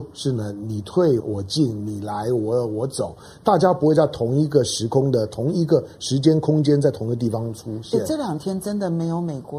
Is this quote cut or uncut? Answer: cut